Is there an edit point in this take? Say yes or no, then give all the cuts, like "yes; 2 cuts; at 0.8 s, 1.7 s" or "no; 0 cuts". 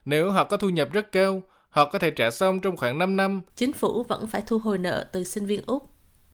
yes; 1 cut; at 3.5 s